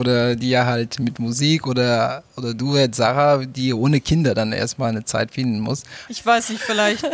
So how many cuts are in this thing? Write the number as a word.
one